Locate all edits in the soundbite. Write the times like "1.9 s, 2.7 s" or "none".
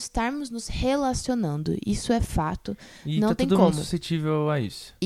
none

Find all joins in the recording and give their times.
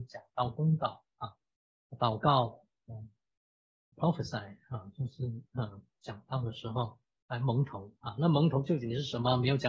3.9 s

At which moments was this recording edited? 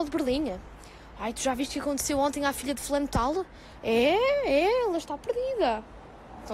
none

